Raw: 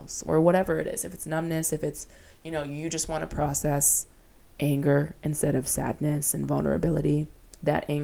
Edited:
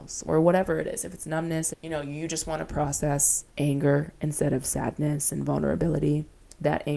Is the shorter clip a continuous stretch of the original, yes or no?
no